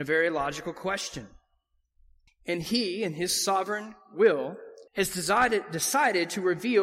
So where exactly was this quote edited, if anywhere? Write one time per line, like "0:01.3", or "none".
0:02.3
0:04.9